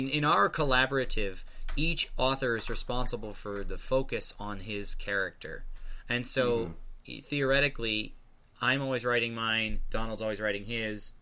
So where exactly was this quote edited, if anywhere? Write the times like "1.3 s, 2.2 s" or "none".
none